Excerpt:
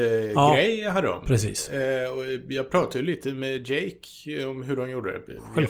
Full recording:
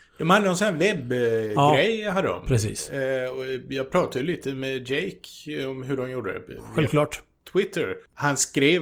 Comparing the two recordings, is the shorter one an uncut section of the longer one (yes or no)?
yes